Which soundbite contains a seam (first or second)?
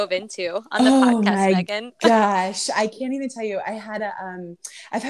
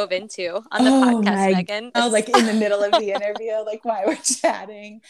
second